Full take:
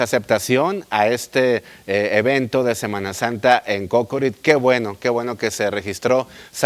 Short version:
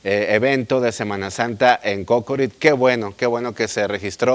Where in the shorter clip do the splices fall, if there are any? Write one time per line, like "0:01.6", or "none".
none